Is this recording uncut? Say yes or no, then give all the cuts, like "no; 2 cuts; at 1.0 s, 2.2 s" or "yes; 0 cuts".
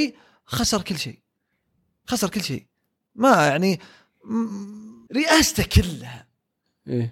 no; 1 cut; at 5.1 s